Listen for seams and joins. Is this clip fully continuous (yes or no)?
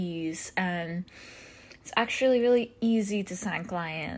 yes